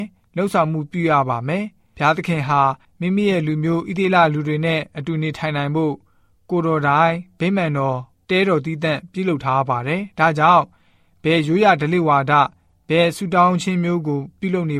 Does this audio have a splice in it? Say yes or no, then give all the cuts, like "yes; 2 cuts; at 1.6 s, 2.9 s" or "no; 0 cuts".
no; 0 cuts